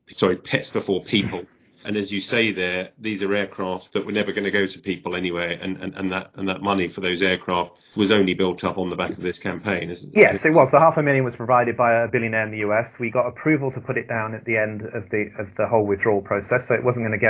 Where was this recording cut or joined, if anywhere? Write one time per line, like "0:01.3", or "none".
0:01.8